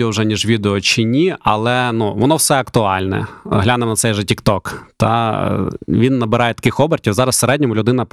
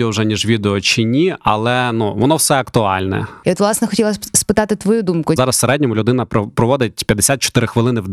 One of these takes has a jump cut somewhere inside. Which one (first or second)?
second